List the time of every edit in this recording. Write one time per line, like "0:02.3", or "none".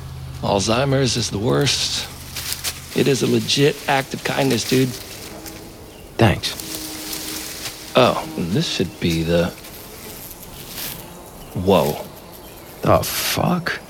0:02.9